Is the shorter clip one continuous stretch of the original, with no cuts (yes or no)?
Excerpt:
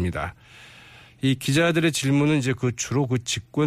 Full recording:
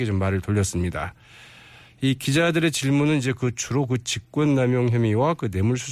yes